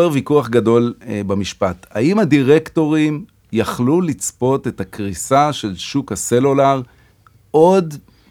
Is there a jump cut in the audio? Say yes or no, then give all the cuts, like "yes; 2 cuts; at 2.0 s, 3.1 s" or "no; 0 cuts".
no; 0 cuts